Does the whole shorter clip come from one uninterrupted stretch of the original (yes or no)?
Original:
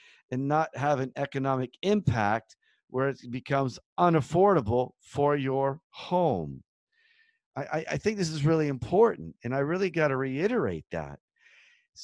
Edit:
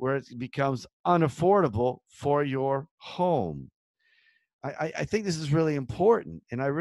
yes